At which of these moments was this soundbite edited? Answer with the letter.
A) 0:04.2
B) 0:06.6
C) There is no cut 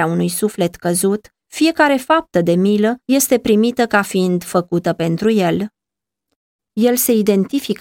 B